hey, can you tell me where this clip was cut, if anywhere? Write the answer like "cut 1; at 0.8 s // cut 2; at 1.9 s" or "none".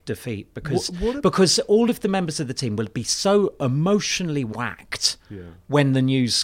none